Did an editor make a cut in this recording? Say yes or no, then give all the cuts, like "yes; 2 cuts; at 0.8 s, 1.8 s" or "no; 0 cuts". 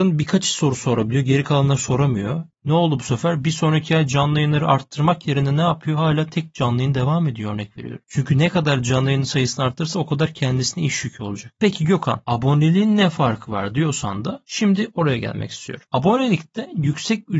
no; 0 cuts